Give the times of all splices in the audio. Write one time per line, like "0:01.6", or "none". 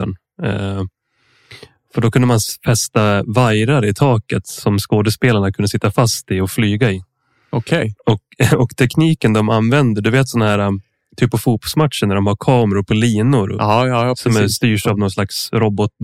none